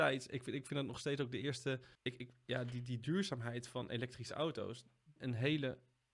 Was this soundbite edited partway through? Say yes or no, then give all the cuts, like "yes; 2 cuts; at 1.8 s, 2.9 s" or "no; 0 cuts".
yes; 2 cuts; at 1.9 s, 5.2 s